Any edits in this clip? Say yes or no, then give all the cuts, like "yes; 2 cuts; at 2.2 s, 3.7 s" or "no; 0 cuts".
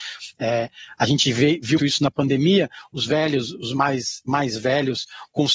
yes; 1 cut; at 1.8 s